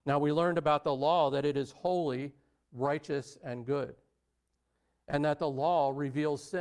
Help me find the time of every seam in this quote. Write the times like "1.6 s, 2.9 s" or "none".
none